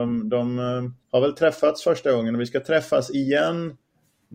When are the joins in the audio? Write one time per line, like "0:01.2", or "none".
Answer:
0:01.0